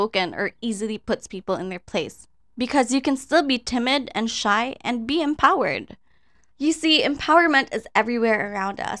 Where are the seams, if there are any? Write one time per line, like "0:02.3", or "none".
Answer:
0:06.5